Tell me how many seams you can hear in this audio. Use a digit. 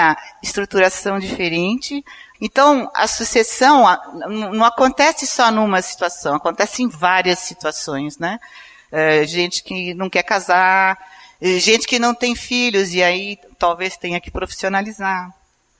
2